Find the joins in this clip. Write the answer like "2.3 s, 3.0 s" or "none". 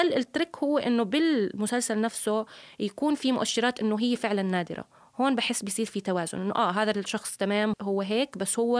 7.7 s